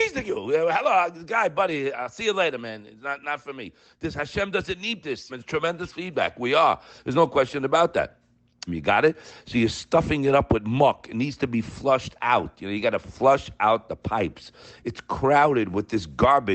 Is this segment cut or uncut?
cut